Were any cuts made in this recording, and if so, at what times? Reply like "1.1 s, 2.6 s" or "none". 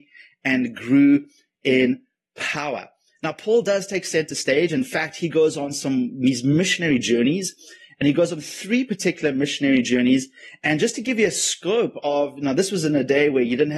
none